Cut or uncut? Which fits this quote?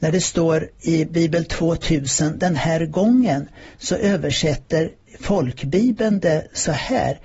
uncut